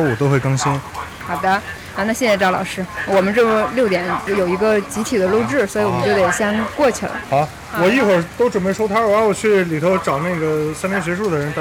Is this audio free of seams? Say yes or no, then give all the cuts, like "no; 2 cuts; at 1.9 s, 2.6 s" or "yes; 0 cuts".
no; 1 cut; at 7.2 s